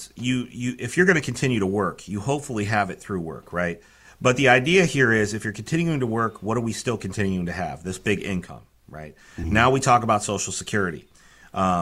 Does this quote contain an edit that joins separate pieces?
no; 0 cuts

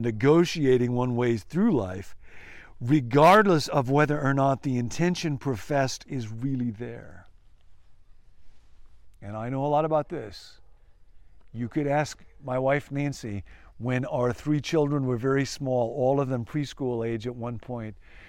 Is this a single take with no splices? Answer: yes; 0 cuts

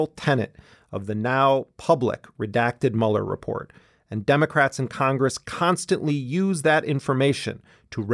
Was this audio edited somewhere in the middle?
no; 0 cuts

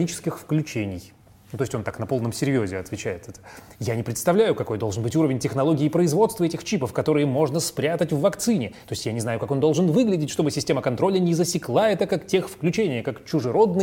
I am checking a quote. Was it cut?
no; 0 cuts

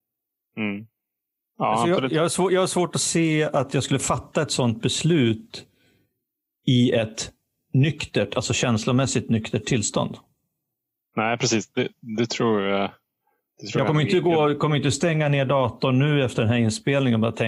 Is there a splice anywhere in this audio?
no; 0 cuts

